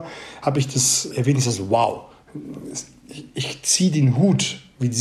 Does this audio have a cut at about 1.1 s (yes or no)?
yes